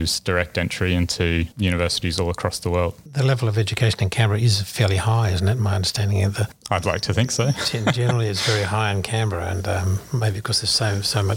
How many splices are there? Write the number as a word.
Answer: zero